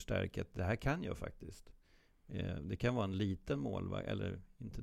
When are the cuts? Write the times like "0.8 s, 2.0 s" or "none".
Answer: none